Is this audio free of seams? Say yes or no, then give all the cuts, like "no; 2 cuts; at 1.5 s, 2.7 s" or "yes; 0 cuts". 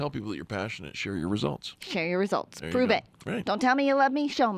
yes; 0 cuts